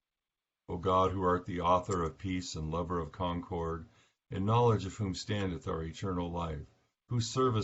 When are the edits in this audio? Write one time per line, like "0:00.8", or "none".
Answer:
none